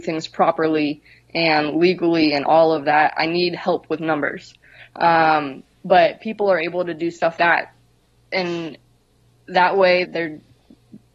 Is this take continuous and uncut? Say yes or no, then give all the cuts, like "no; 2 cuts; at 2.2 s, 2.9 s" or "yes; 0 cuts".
no; 2 cuts; at 7.4 s, 10.0 s